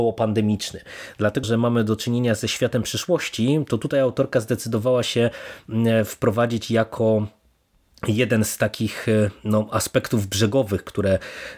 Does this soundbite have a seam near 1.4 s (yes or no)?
yes